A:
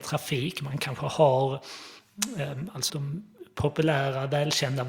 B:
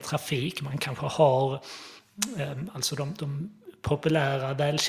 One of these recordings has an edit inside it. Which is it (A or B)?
A